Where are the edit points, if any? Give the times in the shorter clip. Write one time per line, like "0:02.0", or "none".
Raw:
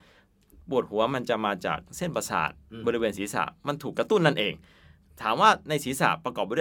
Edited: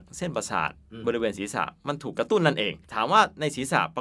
0:02.8